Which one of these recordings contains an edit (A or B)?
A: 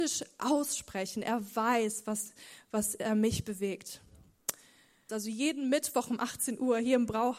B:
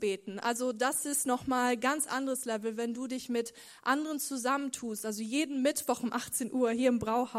A